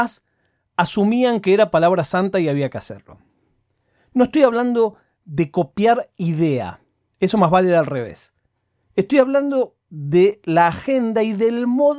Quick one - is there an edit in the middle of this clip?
no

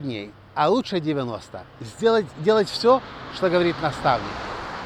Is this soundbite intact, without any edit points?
yes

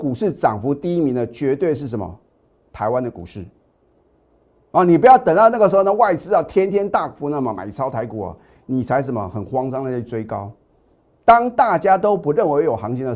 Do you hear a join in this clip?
no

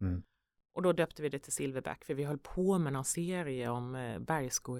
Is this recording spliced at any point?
no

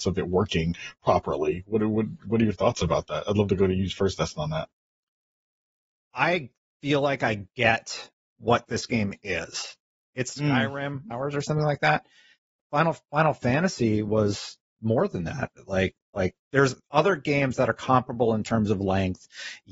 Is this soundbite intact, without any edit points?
no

